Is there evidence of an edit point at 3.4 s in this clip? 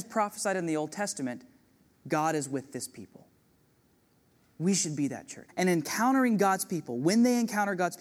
no; 1 cut; at 5.5 s

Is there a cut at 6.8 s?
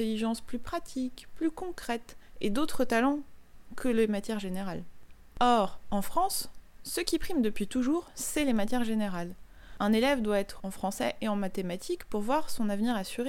no; 1 cut; at 10.6 s

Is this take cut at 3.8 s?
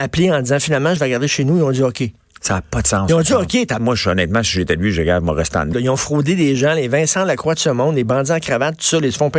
yes; 3 cuts; at 1.0 s, 3.8 s, 5.7 s

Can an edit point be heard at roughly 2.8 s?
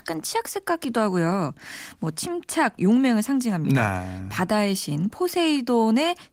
yes; 1 cut; at 2.8 s

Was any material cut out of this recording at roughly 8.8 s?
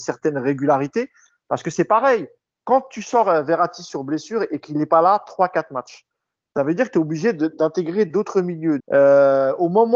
yes; 1 cut; at 8.8 s

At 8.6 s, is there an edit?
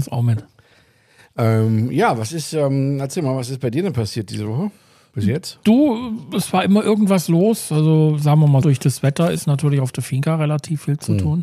yes; 1 cut; at 8.6 s

